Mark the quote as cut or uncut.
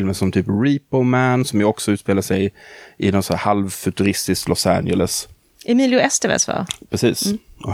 uncut